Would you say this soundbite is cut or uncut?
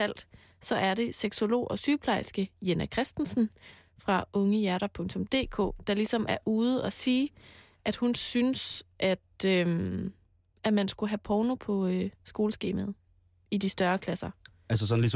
uncut